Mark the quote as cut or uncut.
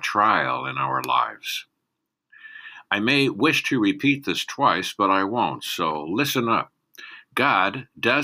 uncut